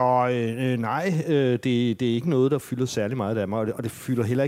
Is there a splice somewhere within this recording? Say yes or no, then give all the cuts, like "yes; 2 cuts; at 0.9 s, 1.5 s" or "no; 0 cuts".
no; 0 cuts